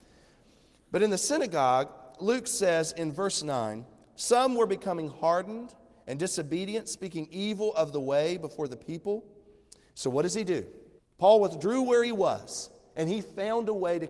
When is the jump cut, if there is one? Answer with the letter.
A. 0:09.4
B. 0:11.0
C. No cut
B